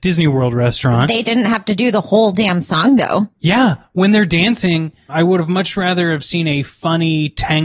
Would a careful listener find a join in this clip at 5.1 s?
yes; 2 cuts; at 3.3 s, 5.1 s

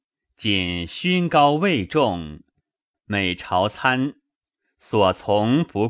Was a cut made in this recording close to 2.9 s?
yes; 1 cut; at 2.9 s

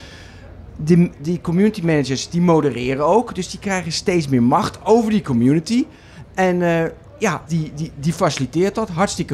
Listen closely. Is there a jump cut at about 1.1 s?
yes; 2 cuts; at 1.1 s, 7.5 s

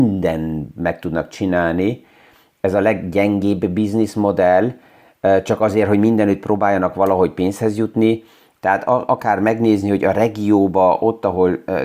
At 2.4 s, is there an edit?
no; 1 cut; at 8.6 s

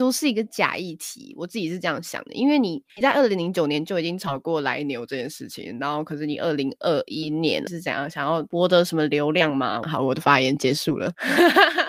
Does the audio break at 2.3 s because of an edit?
no; 2 cuts; at 7.7 s, 9.8 s

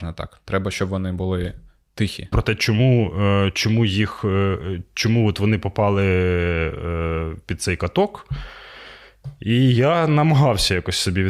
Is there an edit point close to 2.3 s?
yes; 1 cut; at 2.3 s

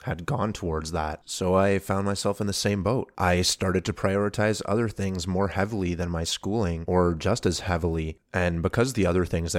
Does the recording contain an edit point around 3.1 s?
no; 0 cuts

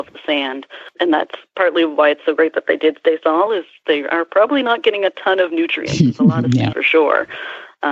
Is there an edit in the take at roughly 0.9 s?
no; 2 cuts; at 3.5 s, 6.7 s

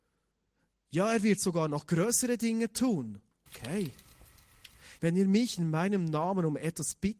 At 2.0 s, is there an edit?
no; 2 cuts; at 3.5 s, 5.0 s

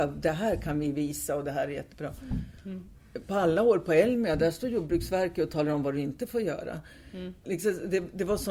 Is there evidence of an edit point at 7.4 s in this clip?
yes; 1 cut; at 7.4 s

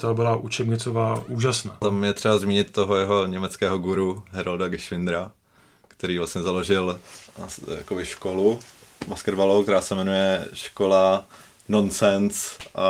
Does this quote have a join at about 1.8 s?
yes; 1 cut; at 1.8 s

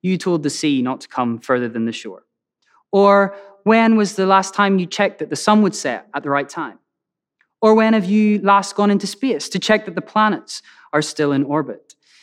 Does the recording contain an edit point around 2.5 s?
no; 0 cuts

